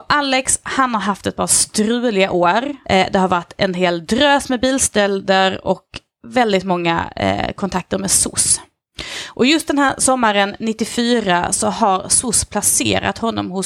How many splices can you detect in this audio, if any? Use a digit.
1